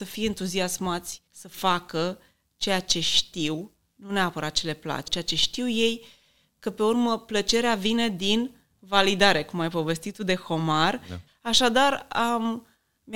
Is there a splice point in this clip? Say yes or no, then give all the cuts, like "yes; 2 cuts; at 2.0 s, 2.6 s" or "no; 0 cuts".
yes; 3 cuts; at 1.3 s, 5.1 s, 11.3 s